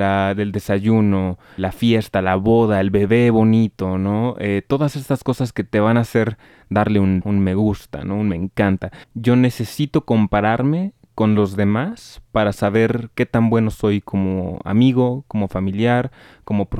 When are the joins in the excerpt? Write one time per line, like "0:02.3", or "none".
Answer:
0:01.6
0:07.2
0:09.0